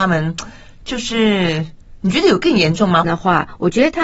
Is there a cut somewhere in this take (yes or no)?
yes